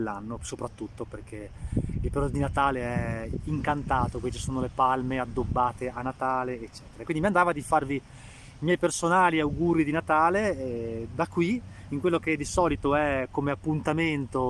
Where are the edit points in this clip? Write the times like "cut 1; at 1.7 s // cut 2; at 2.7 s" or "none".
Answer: none

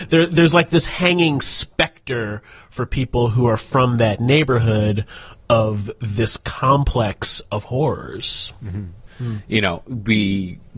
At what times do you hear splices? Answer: cut 1; at 9.1 s

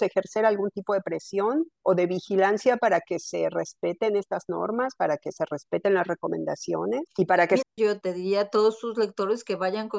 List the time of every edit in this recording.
cut 1; at 7.6 s

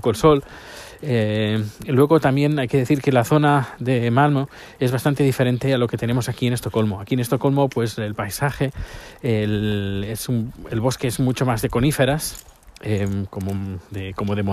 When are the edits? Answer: none

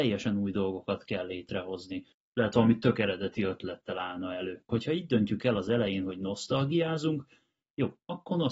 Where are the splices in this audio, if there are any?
cut 1; at 2.1 s // cut 2; at 4.7 s

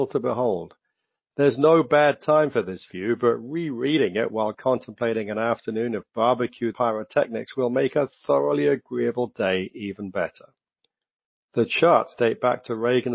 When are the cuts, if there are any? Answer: cut 1; at 6.7 s

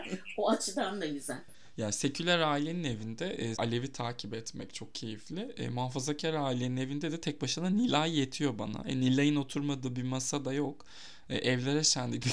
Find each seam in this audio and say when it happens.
cut 1; at 3.5 s

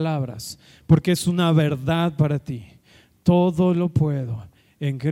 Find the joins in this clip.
none

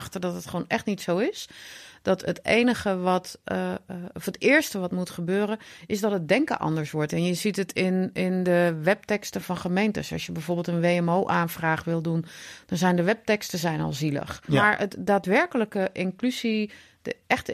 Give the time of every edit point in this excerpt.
cut 1; at 7.1 s // cut 2; at 14.5 s

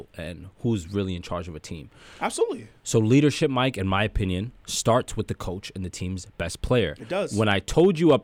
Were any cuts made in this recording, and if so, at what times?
cut 1; at 4.6 s

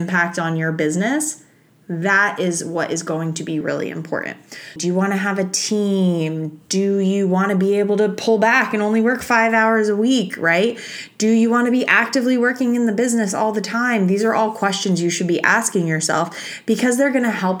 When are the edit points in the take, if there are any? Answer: cut 1; at 3.6 s // cut 2; at 4.8 s

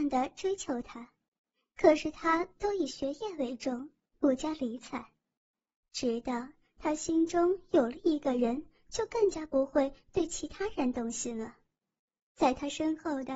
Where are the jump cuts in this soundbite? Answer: cut 1; at 12.3 s

